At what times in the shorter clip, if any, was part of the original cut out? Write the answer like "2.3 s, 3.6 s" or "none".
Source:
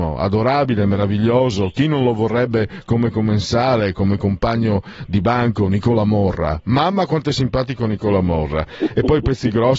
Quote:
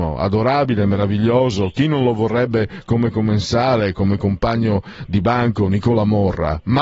none